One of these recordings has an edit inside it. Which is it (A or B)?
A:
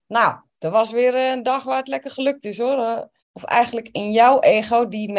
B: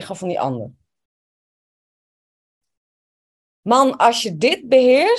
A